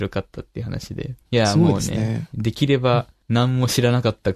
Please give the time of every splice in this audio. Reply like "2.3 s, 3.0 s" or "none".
1.2 s, 2.3 s